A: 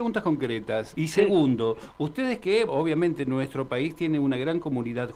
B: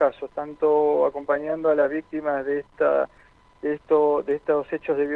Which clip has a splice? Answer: A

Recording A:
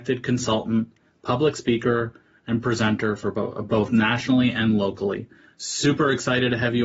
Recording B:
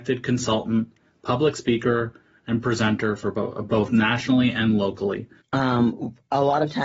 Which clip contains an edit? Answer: B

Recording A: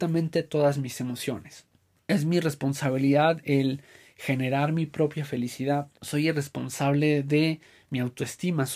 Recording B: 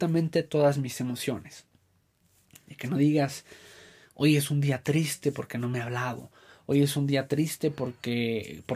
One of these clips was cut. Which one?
A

